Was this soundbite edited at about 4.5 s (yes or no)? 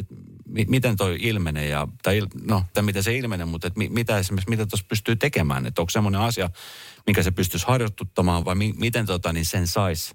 no